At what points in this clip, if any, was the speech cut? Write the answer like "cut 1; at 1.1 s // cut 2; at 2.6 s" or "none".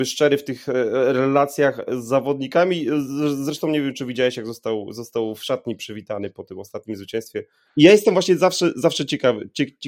cut 1; at 7.6 s